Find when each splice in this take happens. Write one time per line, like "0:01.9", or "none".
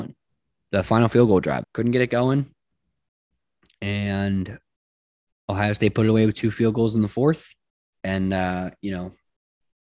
0:01.6
0:07.9